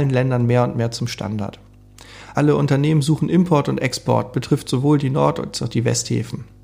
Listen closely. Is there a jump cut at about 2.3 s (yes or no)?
yes